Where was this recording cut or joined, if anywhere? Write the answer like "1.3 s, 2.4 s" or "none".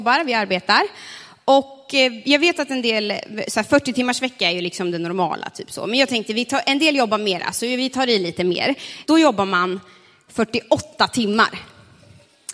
9.0 s